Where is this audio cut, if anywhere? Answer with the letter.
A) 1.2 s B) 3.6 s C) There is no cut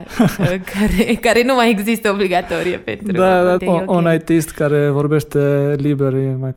B